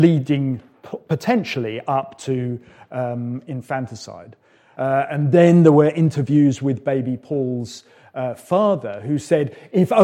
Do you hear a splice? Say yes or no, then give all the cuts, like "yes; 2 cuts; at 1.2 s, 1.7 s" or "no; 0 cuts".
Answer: yes; 1 cut; at 4.7 s